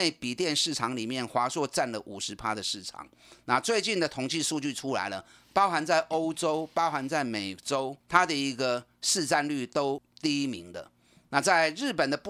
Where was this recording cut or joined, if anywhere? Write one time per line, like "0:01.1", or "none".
0:08.0